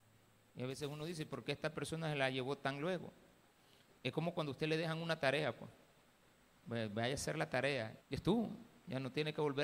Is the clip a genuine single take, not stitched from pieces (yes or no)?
no